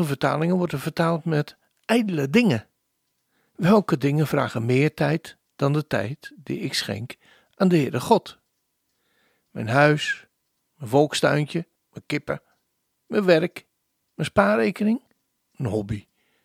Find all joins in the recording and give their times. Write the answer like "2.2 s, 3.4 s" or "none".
3.5 s, 11.8 s